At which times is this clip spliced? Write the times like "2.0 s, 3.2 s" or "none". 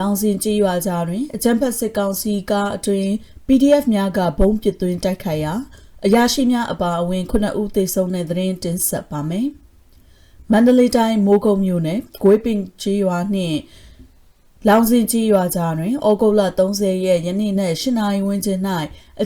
17.5 s